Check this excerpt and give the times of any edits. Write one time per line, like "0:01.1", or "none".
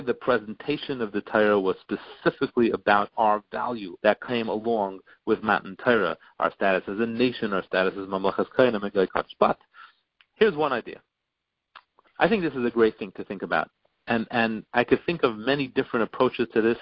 0:04.0
0:12.1